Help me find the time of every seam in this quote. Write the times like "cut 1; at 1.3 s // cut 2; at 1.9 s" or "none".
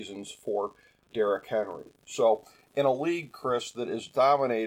none